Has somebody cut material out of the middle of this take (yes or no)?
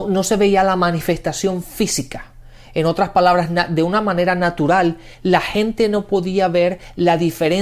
no